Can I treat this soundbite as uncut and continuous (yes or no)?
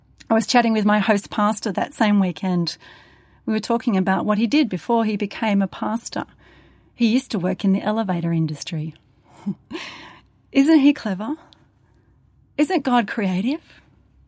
yes